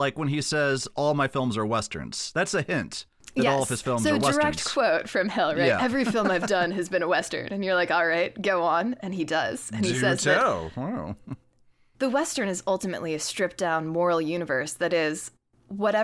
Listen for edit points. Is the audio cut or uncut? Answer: uncut